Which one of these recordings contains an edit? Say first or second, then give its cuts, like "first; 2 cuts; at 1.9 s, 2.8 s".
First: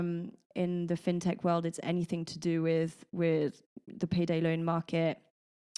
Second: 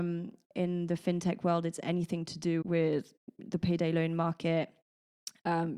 second; 1 cut; at 2.6 s